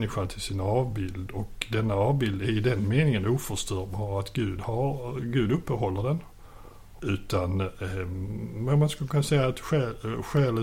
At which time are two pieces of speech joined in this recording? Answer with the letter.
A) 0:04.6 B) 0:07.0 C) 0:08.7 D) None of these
B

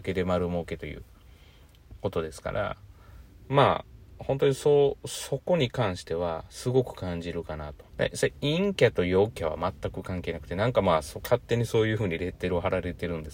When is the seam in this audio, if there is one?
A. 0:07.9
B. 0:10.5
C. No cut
A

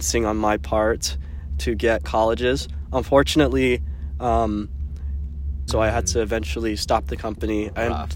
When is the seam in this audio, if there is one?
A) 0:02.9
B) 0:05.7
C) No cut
B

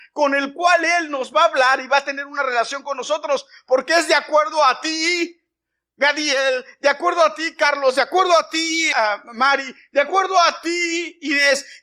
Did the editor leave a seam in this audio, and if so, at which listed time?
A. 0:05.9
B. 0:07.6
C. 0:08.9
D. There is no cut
C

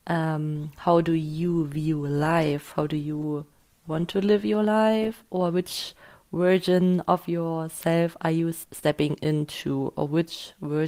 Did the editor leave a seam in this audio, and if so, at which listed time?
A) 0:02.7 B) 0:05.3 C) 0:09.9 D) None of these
D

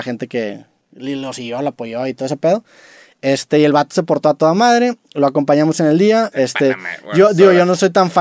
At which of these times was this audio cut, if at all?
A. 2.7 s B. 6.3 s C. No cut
B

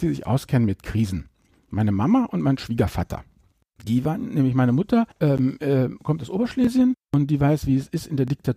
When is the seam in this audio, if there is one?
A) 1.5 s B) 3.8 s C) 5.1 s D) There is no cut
C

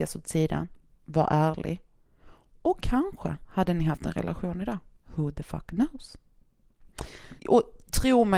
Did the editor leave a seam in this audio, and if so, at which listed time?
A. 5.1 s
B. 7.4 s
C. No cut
B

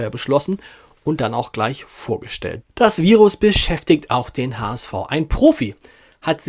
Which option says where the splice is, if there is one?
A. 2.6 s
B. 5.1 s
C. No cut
A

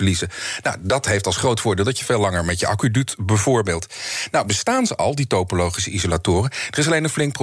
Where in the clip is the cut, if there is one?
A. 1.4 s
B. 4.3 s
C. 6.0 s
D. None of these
D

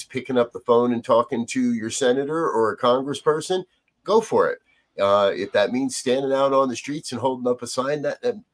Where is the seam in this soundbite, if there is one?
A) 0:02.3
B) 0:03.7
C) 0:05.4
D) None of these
D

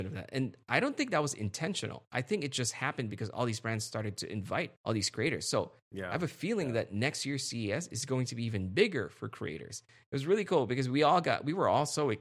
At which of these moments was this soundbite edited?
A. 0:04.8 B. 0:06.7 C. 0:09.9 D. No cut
A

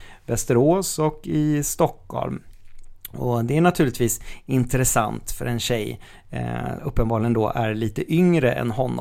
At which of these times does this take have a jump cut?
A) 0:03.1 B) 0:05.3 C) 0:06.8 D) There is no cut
C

